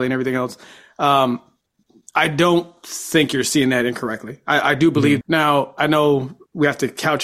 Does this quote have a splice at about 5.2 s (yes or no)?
yes